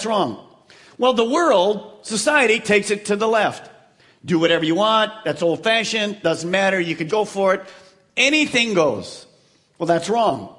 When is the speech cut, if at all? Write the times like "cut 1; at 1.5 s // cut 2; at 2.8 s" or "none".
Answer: cut 1; at 7.1 s